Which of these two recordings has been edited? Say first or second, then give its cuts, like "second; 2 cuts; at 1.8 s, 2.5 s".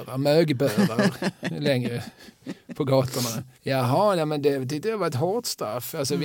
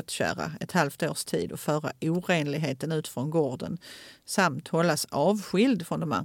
first; 1 cut; at 3.6 s